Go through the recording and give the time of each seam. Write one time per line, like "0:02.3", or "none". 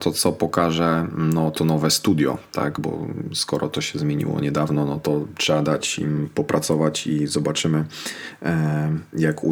none